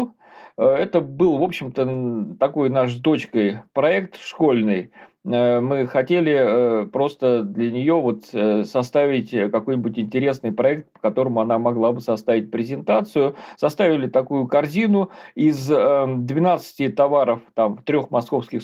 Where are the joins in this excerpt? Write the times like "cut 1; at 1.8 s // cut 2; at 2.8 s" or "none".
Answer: none